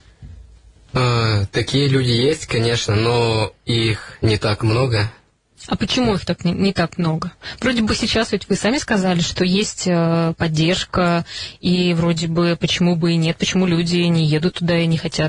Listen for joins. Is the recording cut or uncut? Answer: uncut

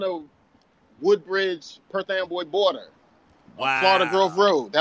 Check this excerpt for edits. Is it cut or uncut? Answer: uncut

